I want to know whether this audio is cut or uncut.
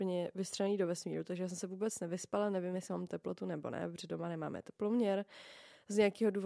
uncut